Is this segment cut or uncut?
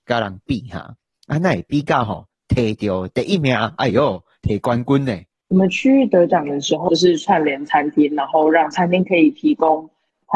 cut